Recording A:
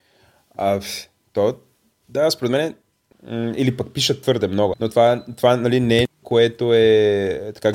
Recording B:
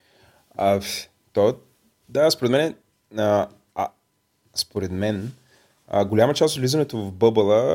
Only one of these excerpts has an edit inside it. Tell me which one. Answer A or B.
A